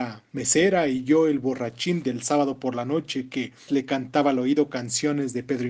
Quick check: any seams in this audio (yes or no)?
yes